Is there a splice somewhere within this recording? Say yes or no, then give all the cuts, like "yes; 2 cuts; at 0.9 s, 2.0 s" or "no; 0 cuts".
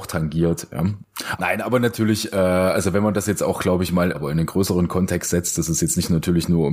yes; 2 cuts; at 1.4 s, 4.1 s